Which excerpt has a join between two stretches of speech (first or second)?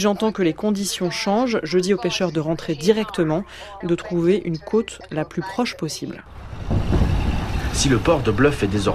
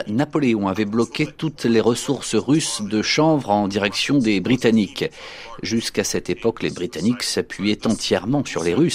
first